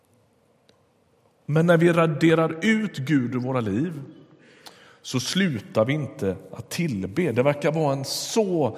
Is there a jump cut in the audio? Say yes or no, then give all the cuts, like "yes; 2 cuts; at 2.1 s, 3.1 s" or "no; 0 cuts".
no; 0 cuts